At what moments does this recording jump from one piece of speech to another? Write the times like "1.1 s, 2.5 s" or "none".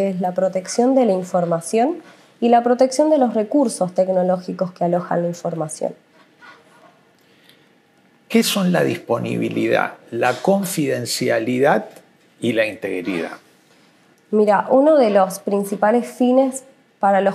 none